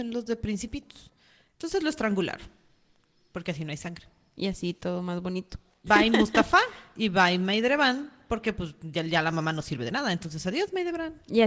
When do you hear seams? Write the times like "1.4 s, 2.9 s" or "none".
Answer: 5.9 s